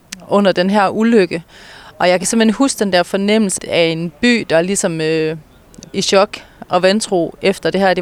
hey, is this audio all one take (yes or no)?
no